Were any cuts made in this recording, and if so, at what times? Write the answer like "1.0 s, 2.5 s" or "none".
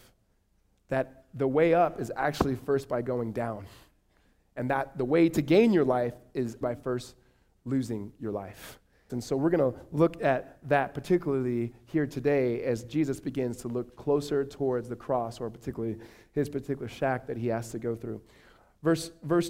6.6 s, 9.1 s